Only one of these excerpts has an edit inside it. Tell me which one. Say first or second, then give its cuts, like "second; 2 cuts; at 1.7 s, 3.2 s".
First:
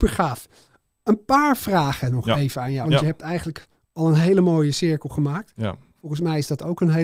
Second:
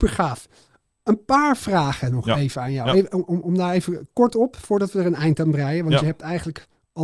first; 2 cuts; at 2.8 s, 5.9 s